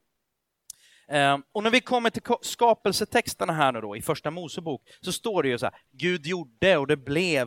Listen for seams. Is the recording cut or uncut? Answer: cut